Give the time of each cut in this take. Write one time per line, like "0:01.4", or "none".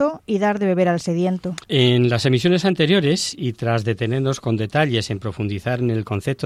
0:01.6